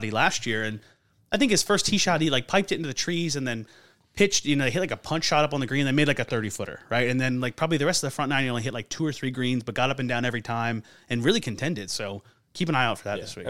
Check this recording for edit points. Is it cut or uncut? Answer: uncut